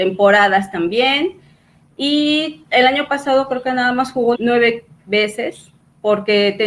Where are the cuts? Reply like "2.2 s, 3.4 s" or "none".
4.3 s